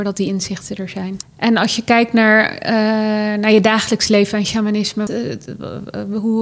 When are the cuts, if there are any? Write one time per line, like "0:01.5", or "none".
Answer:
0:01.2
0:05.1